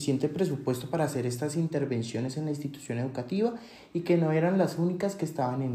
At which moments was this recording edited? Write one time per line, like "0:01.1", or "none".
none